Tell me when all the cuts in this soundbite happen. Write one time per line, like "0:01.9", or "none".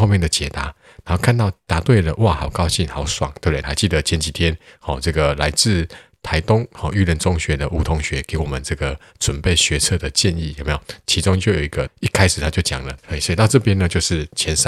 0:03.6
0:11.9
0:13.0